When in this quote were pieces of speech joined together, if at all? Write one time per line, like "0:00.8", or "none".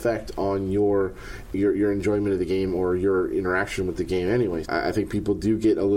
0:04.6